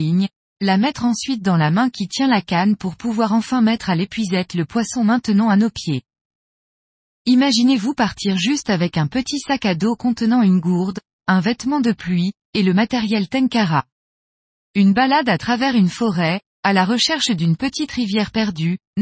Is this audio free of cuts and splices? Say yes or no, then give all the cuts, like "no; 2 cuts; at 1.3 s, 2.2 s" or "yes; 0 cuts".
yes; 0 cuts